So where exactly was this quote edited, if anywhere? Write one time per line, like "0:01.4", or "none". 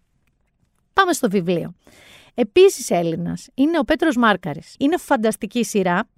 0:04.8